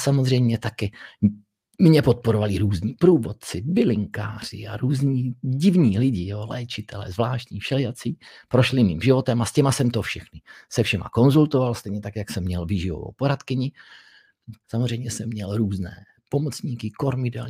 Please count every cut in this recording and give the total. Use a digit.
1